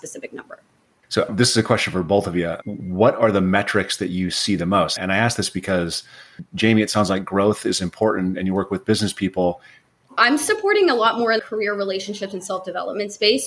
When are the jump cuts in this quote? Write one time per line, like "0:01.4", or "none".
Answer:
0:10.1
0:11.4